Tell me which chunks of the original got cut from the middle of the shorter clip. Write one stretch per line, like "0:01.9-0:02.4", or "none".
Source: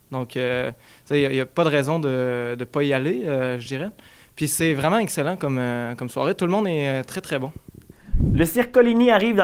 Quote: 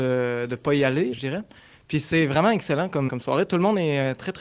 0:03.2-0:03.6
0:05.6-0:06.0